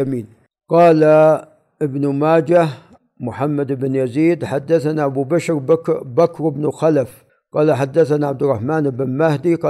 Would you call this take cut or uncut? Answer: uncut